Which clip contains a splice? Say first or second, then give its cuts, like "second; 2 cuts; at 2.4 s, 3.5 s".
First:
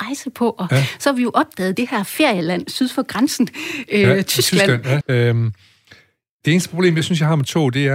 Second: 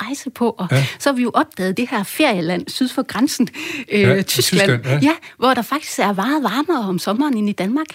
first; 1 cut; at 5.0 s